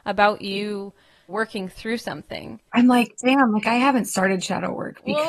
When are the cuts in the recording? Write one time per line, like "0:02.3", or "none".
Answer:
0:01.3
0:02.7